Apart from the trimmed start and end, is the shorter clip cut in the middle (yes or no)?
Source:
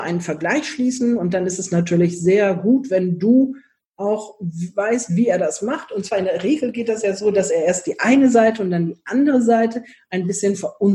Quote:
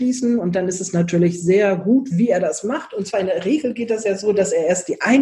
yes